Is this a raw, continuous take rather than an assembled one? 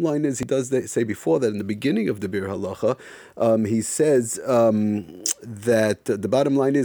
yes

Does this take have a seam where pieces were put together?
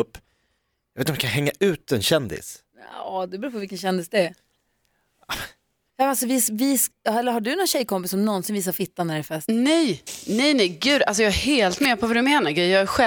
yes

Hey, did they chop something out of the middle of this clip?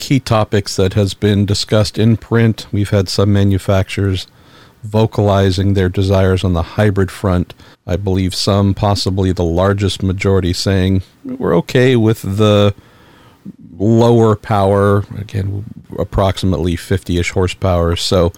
yes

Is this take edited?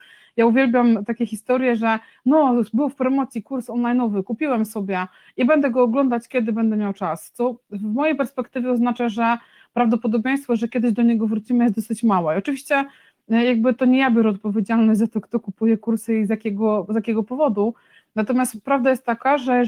no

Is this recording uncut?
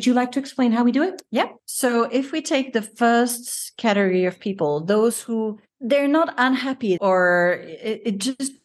no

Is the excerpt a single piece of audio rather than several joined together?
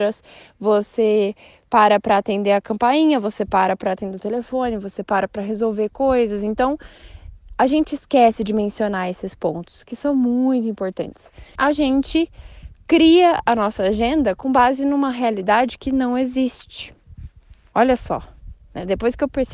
no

